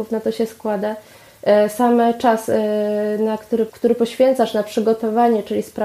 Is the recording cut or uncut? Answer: cut